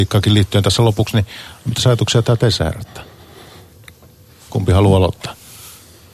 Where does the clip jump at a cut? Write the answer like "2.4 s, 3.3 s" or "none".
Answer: none